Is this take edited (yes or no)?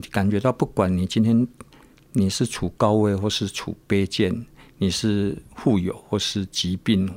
no